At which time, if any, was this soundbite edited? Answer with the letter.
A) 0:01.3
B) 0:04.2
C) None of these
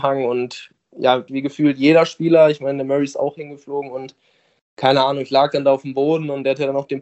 A